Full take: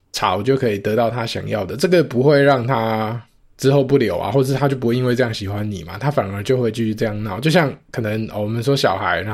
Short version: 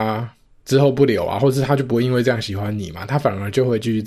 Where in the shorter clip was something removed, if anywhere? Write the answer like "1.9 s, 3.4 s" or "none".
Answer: none